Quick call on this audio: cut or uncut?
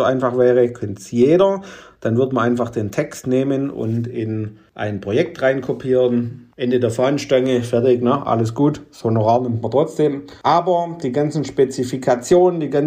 uncut